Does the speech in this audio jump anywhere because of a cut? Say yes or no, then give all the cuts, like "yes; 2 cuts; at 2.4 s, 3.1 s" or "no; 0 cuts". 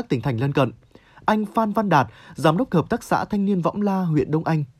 no; 0 cuts